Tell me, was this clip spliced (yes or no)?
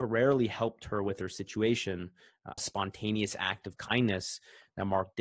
yes